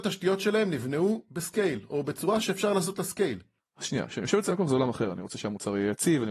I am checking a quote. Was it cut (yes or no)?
yes